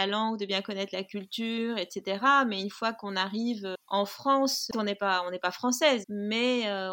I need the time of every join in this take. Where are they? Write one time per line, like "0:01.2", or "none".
0:04.7
0:06.0